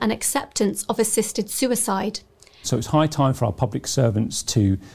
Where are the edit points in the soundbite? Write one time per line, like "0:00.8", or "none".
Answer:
0:02.6